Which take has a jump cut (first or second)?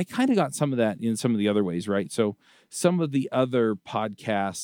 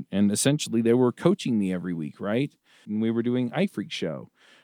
second